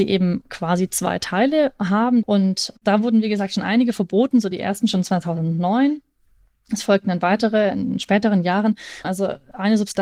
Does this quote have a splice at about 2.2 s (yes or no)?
yes